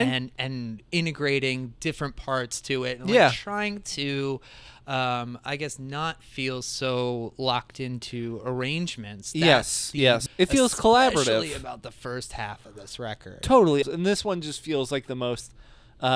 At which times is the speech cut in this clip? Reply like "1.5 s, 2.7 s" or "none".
10.3 s, 13.8 s